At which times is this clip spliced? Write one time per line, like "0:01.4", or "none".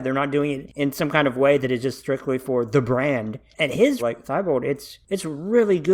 0:04.0